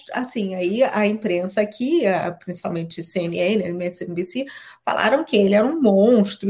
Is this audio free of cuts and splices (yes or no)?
yes